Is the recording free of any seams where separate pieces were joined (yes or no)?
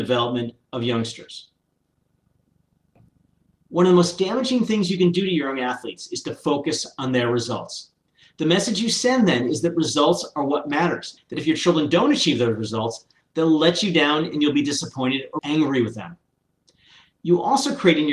no